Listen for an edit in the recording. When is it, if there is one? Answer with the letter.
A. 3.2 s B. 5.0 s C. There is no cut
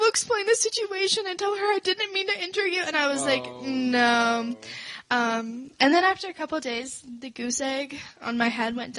B